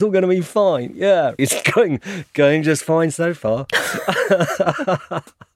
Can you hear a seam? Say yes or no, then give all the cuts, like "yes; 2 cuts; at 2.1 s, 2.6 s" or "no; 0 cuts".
yes; 1 cut; at 1.4 s